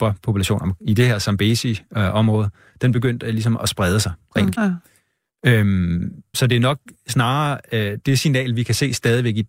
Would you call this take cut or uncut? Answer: cut